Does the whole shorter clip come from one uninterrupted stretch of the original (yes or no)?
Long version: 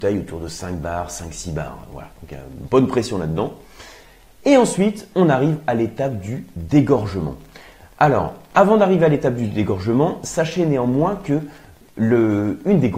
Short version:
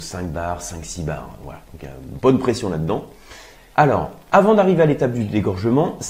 no